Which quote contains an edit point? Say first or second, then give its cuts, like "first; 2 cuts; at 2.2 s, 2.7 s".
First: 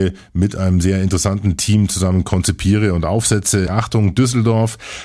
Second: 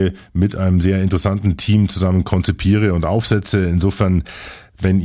first; 1 cut; at 3.7 s